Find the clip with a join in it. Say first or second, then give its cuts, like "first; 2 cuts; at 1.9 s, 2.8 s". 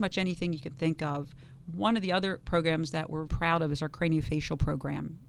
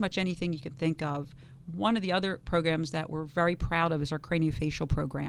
first; 1 cut; at 3.3 s